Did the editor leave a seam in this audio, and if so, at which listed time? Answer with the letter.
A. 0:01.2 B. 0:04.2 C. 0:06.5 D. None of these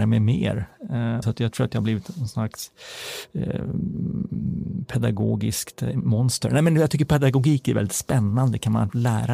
A